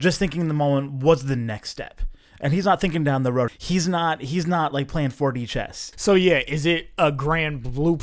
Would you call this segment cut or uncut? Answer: cut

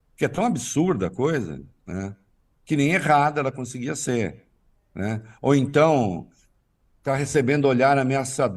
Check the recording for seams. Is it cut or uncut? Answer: uncut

